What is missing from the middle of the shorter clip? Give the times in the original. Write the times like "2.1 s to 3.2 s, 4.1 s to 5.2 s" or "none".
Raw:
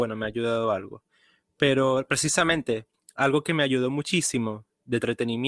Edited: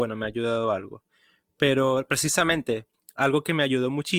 none